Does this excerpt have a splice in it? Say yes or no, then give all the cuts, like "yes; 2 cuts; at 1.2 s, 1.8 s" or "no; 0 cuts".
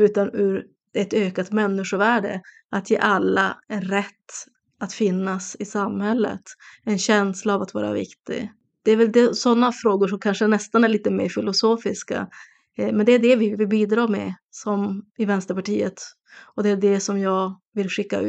no; 0 cuts